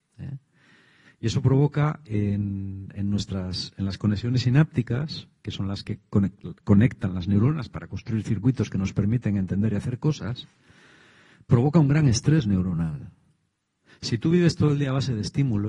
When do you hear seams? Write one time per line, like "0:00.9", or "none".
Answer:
0:01.0